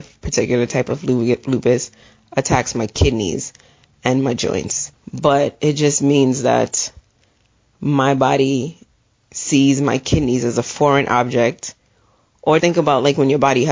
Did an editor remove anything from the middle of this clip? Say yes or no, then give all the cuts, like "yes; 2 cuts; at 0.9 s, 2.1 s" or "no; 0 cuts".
yes; 2 cuts; at 4.9 s, 12.6 s